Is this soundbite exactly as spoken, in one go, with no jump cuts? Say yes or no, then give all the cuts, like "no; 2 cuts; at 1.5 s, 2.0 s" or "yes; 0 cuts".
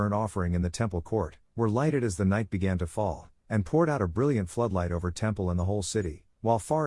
yes; 0 cuts